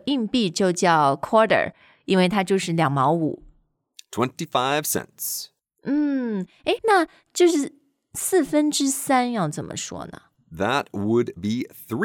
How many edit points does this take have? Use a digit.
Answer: 0